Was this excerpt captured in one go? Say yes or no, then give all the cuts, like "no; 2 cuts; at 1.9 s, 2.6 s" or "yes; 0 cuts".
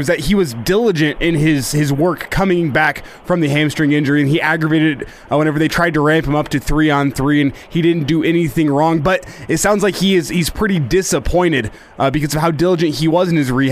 yes; 0 cuts